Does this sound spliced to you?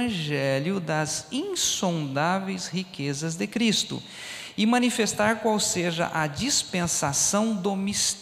no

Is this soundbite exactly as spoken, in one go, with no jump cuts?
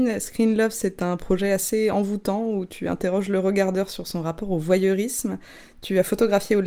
yes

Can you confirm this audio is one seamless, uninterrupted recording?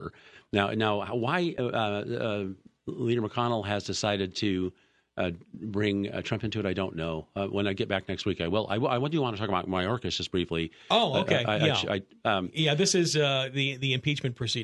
yes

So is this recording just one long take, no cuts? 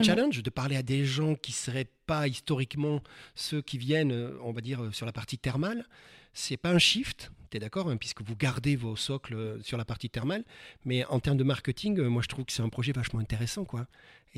yes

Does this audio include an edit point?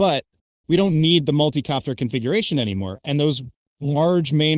yes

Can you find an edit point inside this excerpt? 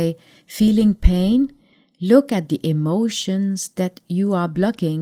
no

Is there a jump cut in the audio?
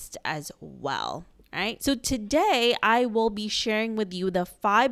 yes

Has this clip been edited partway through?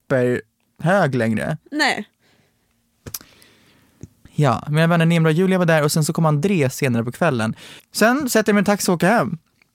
yes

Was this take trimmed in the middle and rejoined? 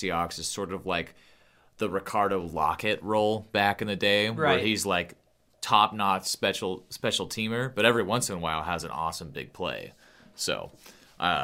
no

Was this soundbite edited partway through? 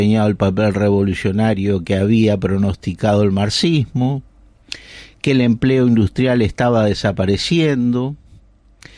no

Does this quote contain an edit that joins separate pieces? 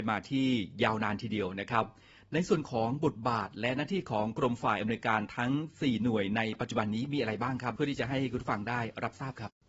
no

